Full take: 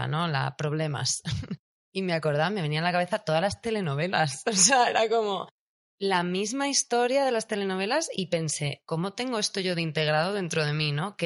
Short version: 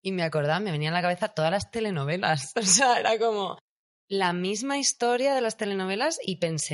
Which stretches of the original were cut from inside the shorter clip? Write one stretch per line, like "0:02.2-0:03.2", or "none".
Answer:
none

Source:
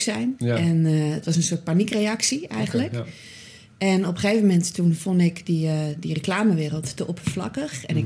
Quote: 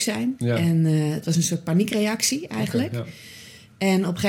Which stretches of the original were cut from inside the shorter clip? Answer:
none

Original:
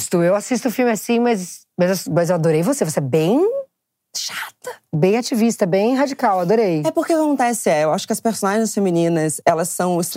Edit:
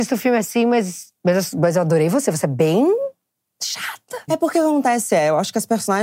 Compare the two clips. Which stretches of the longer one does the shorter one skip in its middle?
0:04.8-0:06.8

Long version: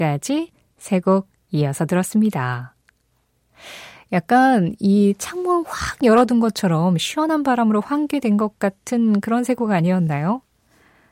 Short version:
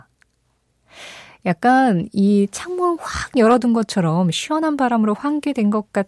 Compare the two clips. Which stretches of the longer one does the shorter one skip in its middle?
none

